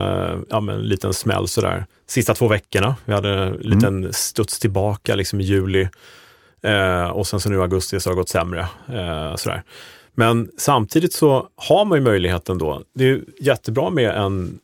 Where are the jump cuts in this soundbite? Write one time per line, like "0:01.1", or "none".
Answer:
none